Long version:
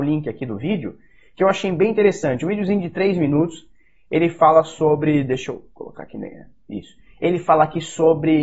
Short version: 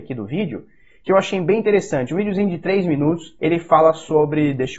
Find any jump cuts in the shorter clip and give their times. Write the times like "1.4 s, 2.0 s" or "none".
3.4 s